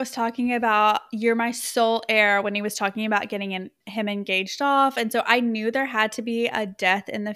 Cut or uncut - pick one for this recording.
uncut